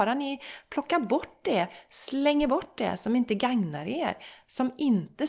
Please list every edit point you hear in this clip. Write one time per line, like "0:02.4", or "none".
none